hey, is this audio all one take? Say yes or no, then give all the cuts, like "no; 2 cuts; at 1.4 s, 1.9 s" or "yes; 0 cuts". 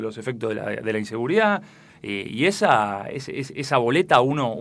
no; 1 cut; at 1.9 s